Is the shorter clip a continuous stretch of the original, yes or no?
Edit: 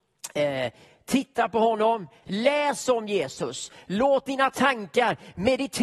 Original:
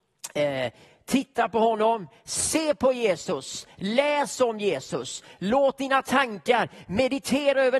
no